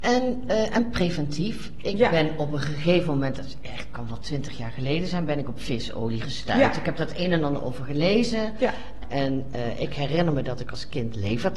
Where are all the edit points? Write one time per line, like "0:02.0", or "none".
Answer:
0:09.0